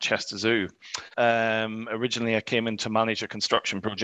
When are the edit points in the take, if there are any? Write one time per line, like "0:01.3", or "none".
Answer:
0:01.1